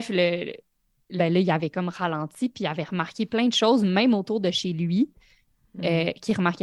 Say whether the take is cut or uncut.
cut